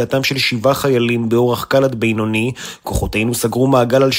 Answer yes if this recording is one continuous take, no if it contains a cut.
yes